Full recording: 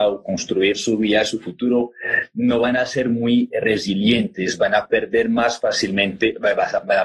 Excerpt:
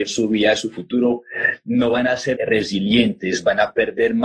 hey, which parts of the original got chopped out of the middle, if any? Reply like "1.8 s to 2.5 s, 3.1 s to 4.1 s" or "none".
3.0 s to 3.5 s